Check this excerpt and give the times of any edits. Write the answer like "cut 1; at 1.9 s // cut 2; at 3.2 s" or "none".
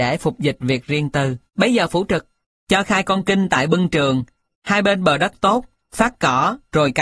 cut 1; at 1.5 s